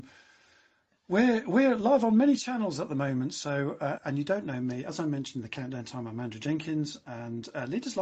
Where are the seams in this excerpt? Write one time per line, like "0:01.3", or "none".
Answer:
0:04.0